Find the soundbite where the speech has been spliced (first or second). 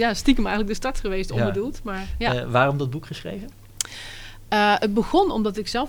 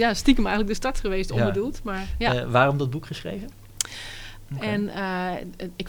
second